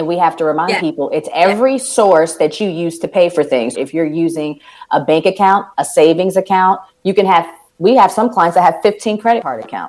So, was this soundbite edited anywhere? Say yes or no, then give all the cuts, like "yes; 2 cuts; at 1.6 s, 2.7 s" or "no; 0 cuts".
yes; 1 cut; at 3.7 s